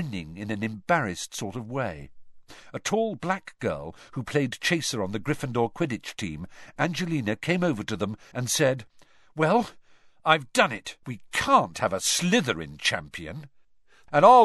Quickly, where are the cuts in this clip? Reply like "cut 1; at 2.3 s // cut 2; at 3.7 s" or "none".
cut 1; at 8.3 s // cut 2; at 11.0 s